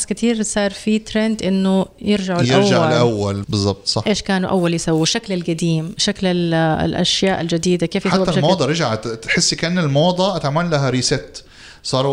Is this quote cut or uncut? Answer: cut